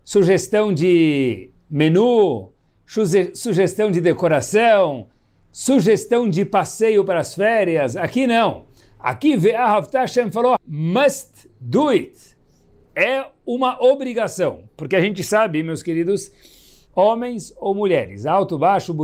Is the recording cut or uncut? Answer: cut